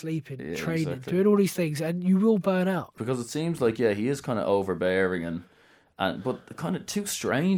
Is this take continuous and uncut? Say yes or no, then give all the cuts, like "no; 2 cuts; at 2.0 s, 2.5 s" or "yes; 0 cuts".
no; 1 cut; at 3.0 s